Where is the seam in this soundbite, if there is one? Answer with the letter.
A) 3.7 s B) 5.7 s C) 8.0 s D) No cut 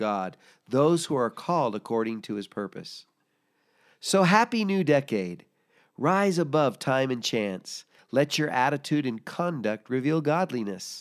C